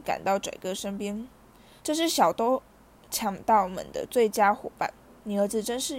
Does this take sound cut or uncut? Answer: cut